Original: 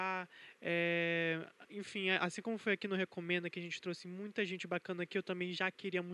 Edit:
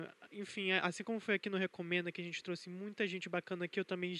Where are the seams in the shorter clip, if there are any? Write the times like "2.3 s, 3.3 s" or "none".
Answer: none